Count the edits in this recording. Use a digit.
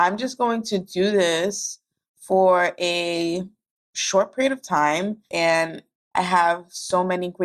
1